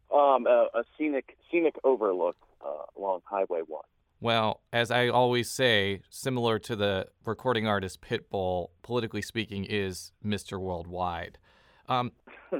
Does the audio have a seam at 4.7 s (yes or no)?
yes